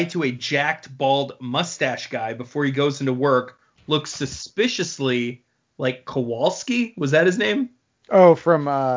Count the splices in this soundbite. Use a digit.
0